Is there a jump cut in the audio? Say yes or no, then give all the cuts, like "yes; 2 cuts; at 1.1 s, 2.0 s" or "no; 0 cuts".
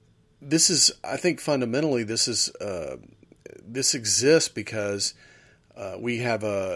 no; 0 cuts